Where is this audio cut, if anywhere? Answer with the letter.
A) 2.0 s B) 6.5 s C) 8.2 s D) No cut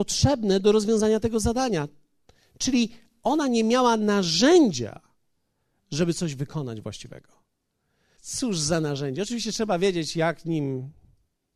C